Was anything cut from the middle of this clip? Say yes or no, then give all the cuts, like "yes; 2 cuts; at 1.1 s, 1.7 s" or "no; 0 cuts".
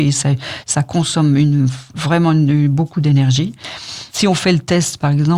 yes; 1 cut; at 4.1 s